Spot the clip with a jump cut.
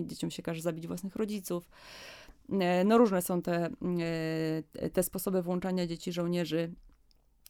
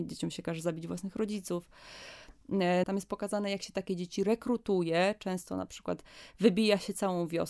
second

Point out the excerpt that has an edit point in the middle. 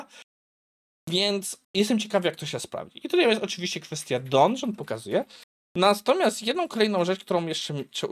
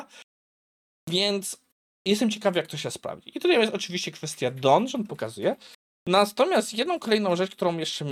first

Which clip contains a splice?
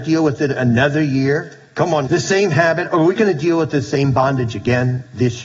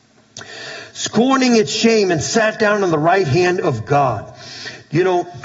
first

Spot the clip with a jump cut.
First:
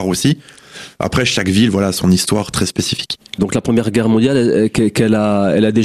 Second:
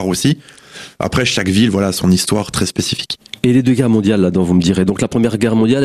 first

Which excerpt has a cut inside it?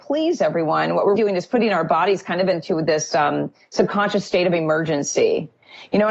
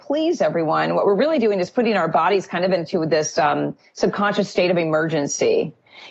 first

